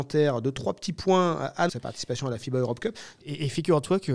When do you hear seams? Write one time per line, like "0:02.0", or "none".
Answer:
0:01.7
0:03.2